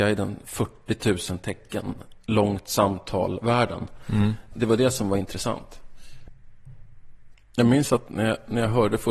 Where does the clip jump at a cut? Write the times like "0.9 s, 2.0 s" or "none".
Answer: 7.3 s